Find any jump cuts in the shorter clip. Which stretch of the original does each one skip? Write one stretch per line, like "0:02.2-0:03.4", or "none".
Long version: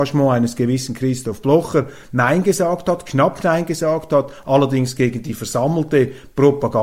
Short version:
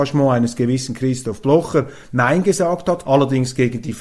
0:03.0-0:04.4